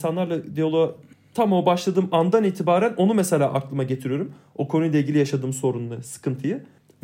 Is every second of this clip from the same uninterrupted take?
yes; 0 cuts

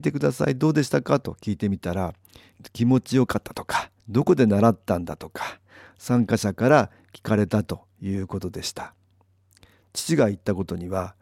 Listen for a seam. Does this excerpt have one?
yes; 1 cut; at 4.0 s

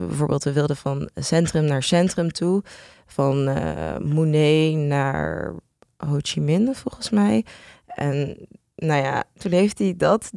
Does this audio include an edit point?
yes; 1 cut; at 7.8 s

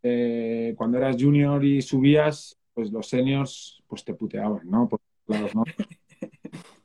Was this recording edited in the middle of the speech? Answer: no; 0 cuts

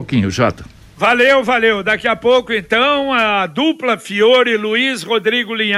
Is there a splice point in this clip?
no; 0 cuts

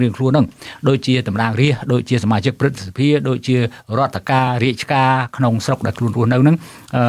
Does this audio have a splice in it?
no; 0 cuts

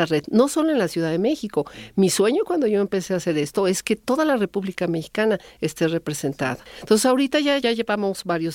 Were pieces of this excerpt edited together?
no; 0 cuts

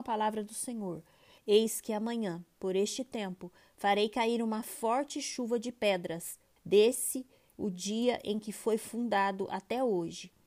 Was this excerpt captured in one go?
no; 2 cuts; at 1.4 s, 6.6 s

